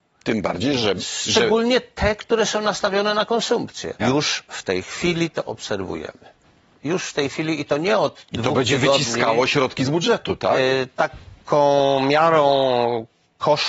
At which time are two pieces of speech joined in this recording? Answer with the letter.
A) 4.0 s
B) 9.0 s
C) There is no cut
A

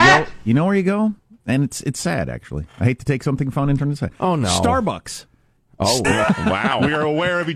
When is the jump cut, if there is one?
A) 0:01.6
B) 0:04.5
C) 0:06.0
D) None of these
C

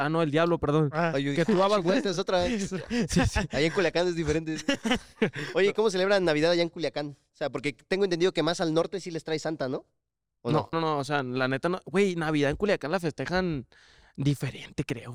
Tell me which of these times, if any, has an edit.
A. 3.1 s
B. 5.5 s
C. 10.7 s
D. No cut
C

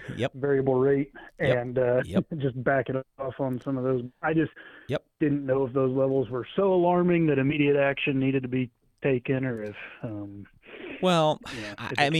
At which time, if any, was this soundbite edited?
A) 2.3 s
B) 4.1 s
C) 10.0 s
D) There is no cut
D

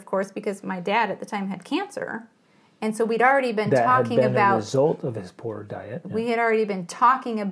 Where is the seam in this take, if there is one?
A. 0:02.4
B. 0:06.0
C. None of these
B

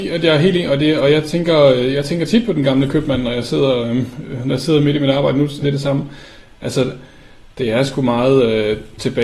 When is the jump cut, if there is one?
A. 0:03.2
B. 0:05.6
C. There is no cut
B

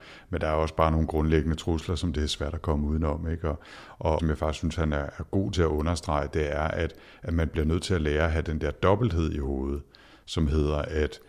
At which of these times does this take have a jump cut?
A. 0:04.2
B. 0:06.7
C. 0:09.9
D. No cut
A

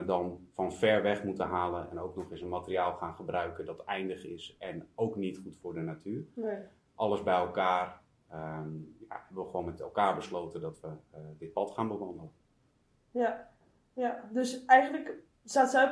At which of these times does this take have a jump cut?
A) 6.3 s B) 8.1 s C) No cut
C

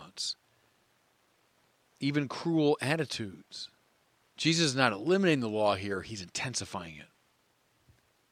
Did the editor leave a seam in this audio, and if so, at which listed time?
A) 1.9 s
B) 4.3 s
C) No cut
B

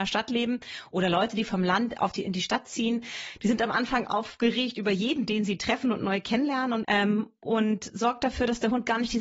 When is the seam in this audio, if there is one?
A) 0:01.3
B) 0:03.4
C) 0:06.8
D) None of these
C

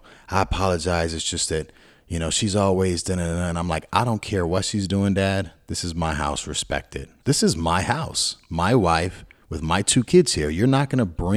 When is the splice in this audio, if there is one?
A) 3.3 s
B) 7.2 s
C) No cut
B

